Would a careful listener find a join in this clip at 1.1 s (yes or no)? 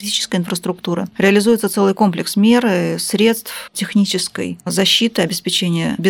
no